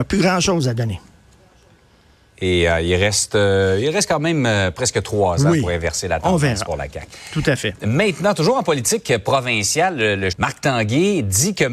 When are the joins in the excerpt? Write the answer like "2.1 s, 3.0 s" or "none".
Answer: 10.3 s